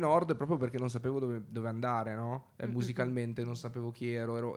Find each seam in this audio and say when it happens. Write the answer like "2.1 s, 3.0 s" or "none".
none